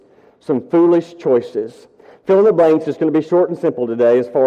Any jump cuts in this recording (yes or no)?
no